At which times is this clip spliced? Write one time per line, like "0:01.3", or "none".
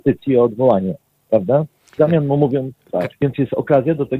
0:02.0
0:03.1